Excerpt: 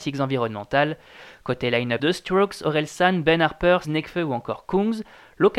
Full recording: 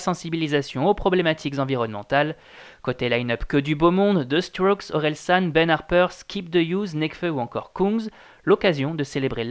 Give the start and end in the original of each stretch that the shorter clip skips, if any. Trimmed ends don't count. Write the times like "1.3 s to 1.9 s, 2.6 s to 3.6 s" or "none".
3.4 s to 4.3 s, 6.1 s to 6.9 s